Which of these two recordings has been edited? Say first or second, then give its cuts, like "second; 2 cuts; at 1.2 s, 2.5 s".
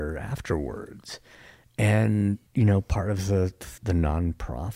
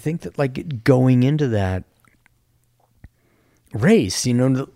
first; 2 cuts; at 2.5 s, 3.8 s